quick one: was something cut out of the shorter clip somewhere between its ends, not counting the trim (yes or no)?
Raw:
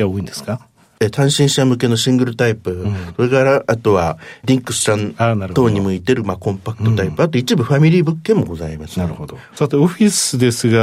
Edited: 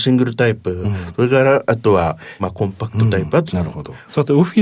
yes